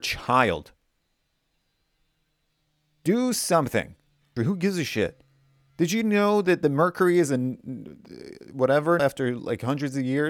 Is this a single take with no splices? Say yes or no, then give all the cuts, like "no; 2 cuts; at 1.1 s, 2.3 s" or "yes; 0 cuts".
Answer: no; 2 cuts; at 4.4 s, 9.0 s